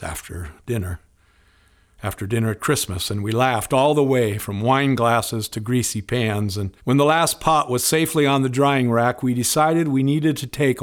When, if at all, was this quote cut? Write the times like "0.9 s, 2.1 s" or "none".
6.8 s